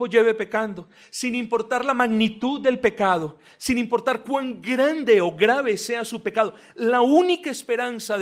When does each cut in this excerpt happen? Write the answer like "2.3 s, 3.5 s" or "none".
none